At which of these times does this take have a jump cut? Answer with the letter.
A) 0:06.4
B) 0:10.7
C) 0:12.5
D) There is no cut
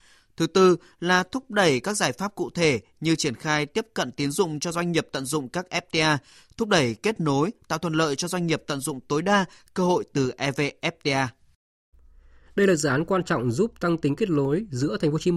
C